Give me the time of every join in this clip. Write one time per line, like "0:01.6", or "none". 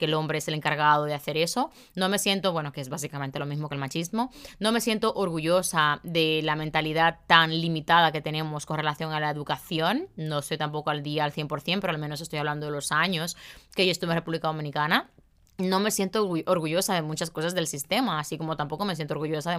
none